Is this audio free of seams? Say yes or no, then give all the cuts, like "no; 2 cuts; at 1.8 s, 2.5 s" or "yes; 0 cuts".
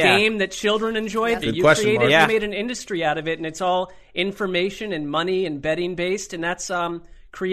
no; 1 cut; at 1.4 s